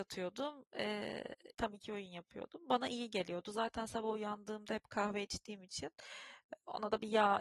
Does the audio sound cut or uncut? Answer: cut